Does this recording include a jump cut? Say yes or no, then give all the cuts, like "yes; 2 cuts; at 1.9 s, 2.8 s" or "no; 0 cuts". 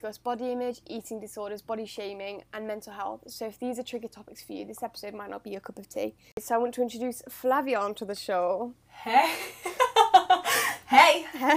no; 0 cuts